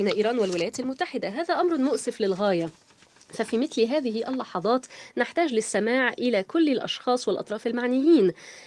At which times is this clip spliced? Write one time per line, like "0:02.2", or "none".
none